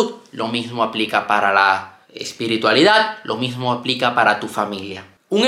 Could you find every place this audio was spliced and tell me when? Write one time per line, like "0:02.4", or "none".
0:02.0